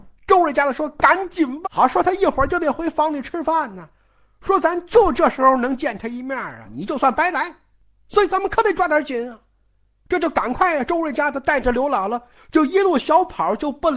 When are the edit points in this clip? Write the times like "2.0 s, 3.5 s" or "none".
1.6 s, 6.6 s